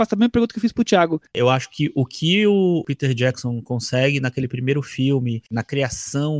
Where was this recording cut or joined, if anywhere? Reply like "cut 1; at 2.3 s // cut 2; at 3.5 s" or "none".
cut 1; at 1.3 s